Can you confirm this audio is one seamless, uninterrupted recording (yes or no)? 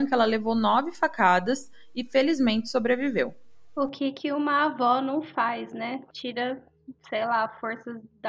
no